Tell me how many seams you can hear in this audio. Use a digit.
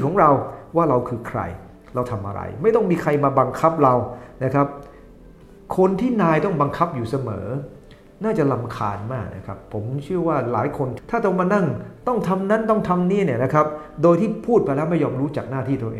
0